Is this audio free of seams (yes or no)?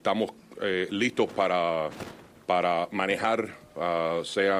yes